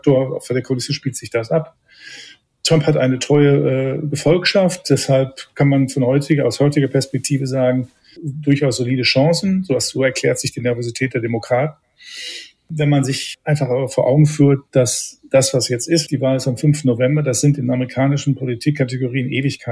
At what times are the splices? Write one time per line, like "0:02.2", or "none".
0:08.2
0:16.1